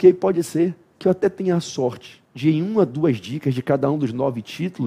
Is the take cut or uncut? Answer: cut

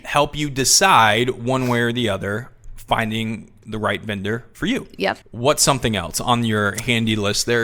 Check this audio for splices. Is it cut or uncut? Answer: cut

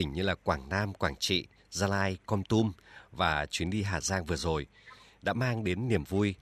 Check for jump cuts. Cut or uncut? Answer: uncut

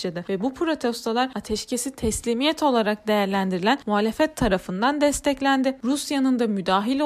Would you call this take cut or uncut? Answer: cut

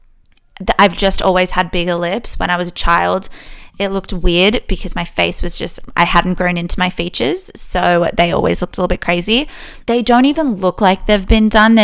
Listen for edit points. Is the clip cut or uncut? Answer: cut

